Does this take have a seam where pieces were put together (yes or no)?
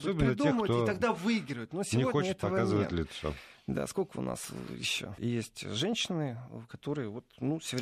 yes